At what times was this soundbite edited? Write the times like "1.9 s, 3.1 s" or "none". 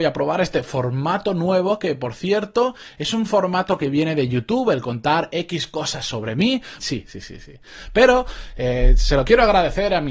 6.8 s